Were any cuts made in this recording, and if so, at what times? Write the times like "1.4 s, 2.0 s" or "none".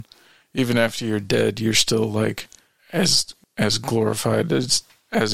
none